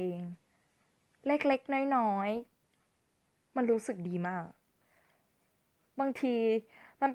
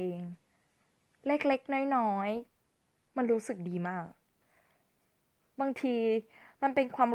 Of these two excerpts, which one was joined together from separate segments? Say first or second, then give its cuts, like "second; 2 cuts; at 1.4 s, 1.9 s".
second; 1 cut; at 2.5 s